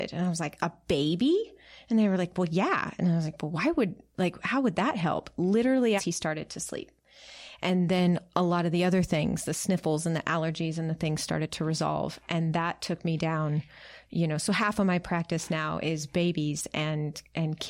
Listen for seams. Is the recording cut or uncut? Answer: cut